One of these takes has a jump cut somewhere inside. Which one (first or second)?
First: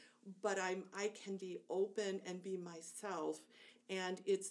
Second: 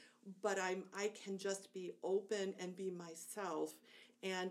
first